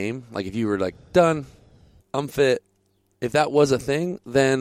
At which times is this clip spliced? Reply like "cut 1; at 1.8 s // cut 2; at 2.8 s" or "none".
cut 1; at 2.0 s